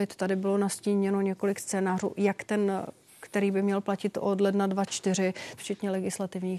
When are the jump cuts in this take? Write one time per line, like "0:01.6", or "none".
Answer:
0:05.6